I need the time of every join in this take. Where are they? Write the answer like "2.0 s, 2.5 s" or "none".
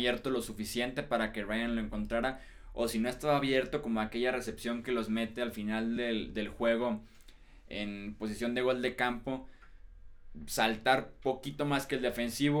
none